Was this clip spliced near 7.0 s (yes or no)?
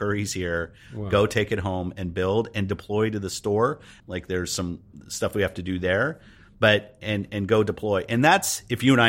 no